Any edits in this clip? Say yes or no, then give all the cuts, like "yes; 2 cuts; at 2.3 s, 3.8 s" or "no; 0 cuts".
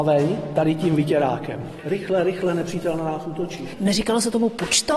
no; 0 cuts